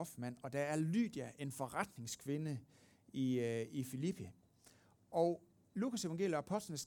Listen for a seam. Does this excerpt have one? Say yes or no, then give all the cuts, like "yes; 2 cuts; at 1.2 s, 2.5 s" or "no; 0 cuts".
no; 0 cuts